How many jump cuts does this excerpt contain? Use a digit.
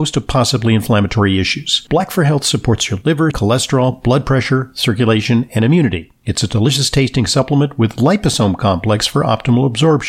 1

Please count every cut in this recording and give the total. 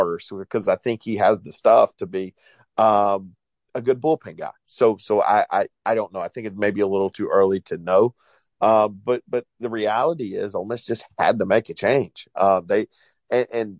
0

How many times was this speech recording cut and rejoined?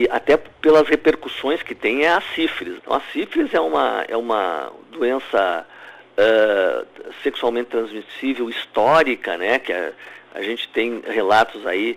1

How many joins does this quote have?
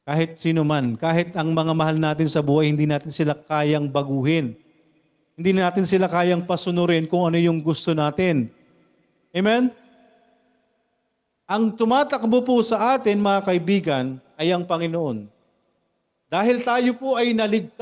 0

